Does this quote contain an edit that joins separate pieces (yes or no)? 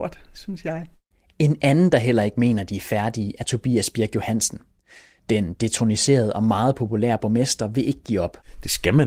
no